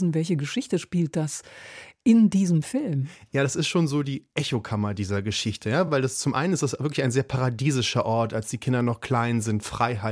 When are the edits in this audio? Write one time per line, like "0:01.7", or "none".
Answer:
none